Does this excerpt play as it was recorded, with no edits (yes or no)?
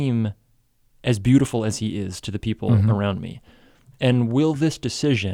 yes